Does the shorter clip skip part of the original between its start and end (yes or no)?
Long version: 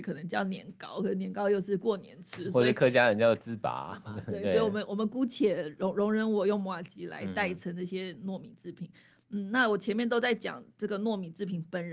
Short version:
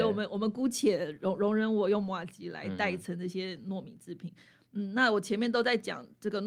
no